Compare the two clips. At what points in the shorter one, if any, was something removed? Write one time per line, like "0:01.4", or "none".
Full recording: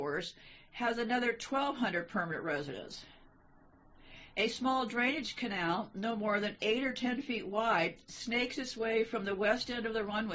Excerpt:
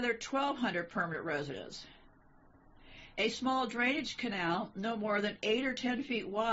none